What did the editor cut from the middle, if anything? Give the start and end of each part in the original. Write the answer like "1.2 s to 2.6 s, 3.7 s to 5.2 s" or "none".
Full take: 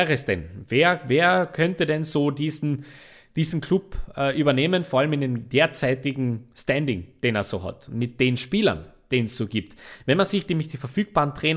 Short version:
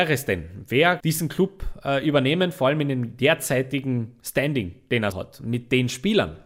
1.0 s to 3.3 s, 7.4 s to 7.6 s